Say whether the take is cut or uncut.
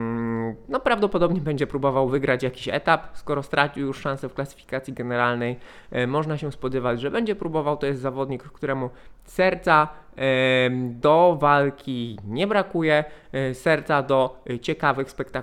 uncut